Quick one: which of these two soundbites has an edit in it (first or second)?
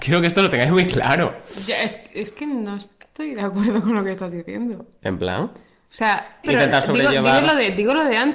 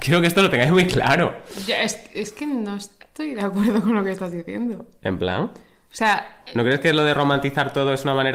first